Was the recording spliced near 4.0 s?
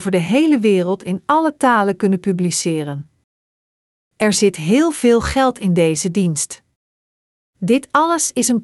yes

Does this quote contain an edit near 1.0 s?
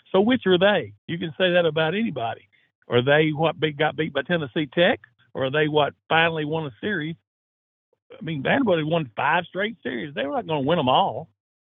yes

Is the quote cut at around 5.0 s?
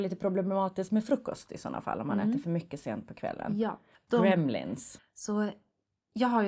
yes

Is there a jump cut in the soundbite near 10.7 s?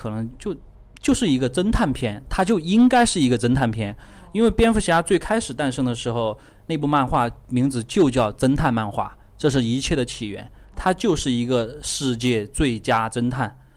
no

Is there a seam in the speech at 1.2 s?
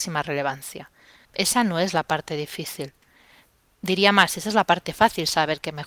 yes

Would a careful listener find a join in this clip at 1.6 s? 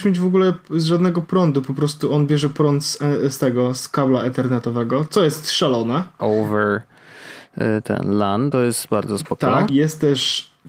no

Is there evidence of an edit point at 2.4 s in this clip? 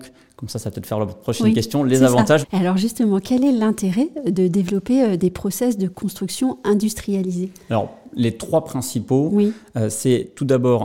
yes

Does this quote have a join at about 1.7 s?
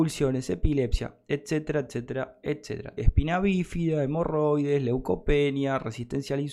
no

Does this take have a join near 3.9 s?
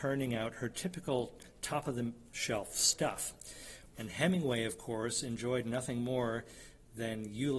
yes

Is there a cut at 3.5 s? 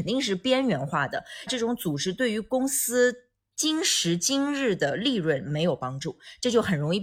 no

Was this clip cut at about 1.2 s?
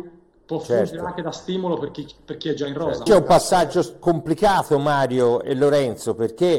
no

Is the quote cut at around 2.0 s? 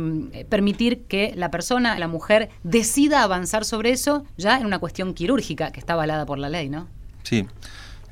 yes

